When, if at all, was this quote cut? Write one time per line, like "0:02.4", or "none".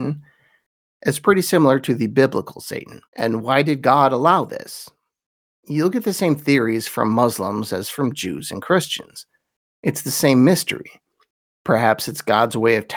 0:03.0